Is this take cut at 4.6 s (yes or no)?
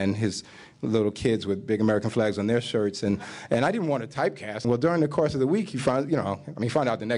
yes